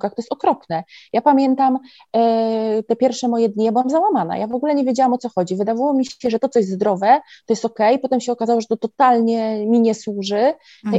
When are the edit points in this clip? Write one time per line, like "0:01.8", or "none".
none